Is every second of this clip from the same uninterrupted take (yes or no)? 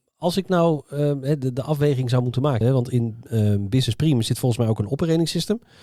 no